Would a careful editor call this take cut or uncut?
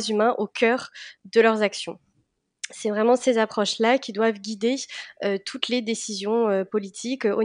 uncut